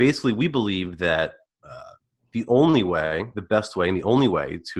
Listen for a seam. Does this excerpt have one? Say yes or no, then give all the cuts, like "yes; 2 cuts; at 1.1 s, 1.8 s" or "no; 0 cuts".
no; 0 cuts